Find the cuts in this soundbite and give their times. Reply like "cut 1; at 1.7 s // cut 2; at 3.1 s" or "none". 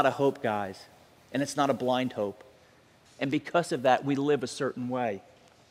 cut 1; at 3.0 s